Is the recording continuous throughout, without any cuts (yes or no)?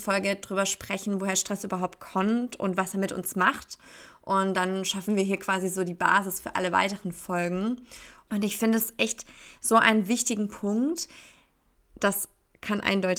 no